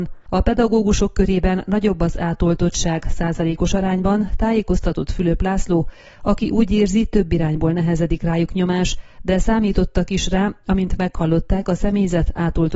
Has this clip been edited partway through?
no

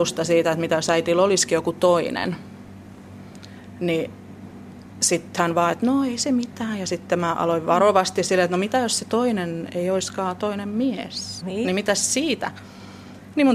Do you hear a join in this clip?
yes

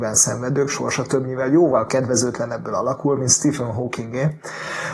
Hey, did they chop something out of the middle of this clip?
no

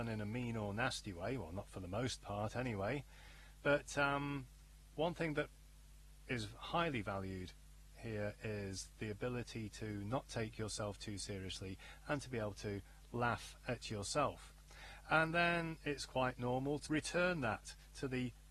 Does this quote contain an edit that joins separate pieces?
yes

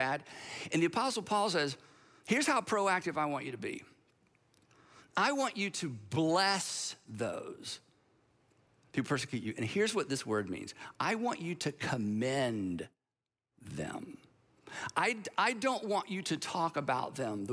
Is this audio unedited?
yes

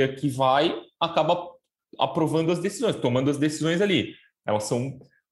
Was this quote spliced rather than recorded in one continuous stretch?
yes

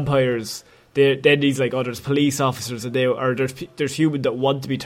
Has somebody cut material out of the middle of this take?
no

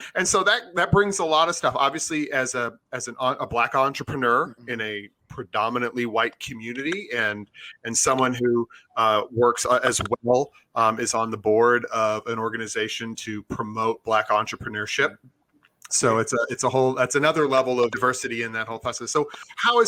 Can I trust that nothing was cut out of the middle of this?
no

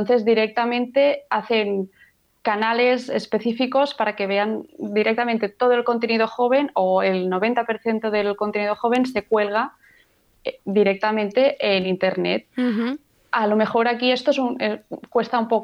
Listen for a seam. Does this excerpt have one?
no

